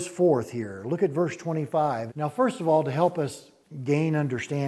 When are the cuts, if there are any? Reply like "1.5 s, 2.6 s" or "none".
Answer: 2.1 s